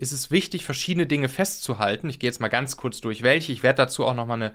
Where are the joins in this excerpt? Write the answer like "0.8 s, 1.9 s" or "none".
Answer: none

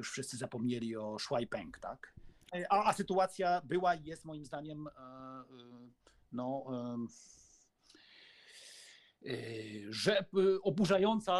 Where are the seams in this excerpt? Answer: 2.5 s

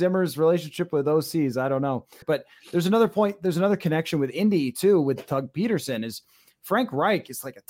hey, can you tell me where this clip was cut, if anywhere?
2.2 s

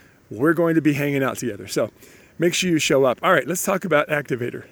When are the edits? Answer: none

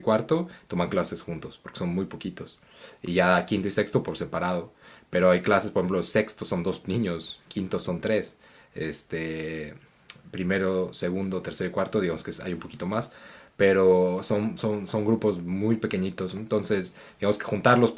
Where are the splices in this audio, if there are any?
none

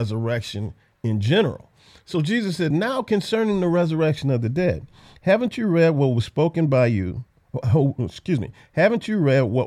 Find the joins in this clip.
none

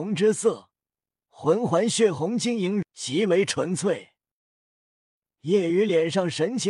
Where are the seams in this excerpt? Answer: 2.8 s

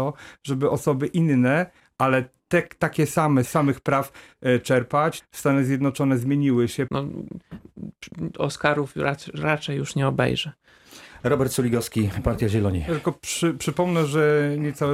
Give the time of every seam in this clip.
3.5 s, 5.2 s, 6.9 s

